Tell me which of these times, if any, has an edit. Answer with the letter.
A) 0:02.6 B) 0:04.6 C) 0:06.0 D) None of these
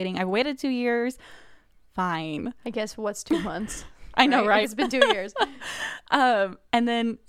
B